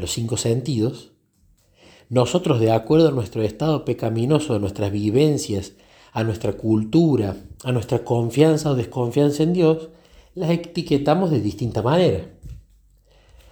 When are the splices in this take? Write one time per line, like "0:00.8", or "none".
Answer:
none